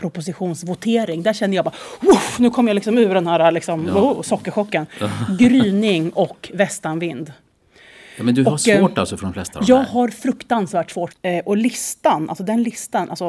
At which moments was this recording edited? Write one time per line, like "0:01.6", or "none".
0:11.1